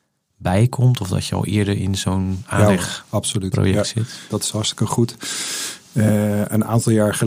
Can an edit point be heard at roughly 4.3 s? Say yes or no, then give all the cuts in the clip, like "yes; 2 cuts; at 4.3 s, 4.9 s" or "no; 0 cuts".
yes; 1 cut; at 4.3 s